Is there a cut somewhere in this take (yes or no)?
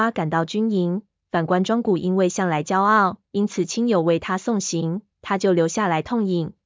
yes